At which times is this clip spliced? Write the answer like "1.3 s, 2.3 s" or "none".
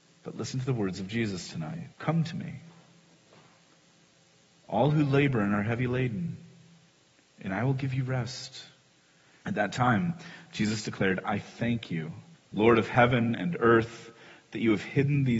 1.9 s, 9.4 s, 12.3 s